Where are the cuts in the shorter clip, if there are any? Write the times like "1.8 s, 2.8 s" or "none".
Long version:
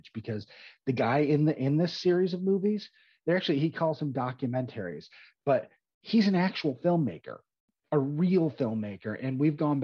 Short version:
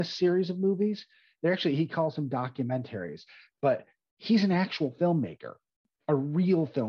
none

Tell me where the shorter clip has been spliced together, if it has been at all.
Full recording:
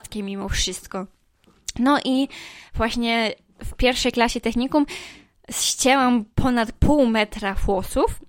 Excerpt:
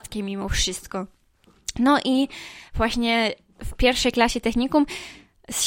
none

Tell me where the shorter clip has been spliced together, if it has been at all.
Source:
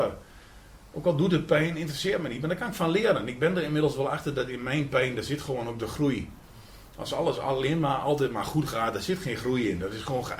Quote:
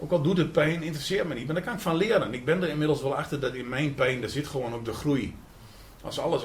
none

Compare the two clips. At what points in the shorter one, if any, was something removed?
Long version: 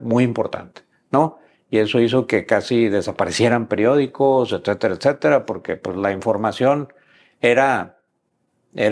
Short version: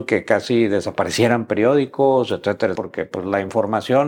2.8 s

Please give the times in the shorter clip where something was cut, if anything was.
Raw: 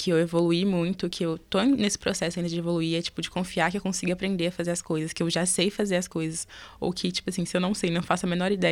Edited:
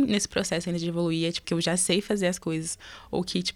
1.4 s

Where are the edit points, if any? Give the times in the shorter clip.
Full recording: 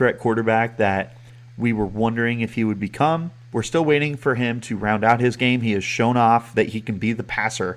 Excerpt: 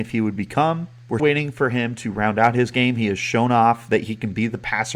1.2 s

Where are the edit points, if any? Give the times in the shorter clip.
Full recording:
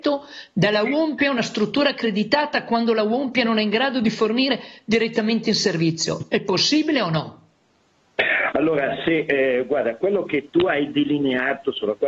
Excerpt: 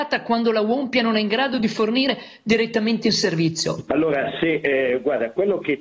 3.9 s

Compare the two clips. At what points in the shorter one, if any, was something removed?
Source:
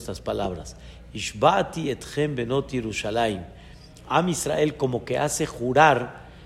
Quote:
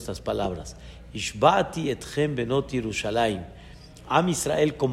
none

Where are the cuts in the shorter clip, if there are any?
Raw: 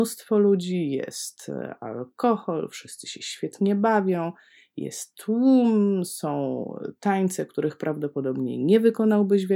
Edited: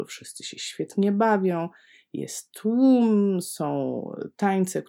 none

